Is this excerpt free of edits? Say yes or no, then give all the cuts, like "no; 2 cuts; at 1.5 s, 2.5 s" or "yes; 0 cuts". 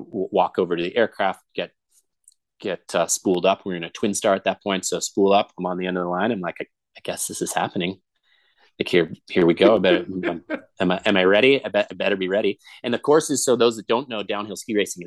yes; 0 cuts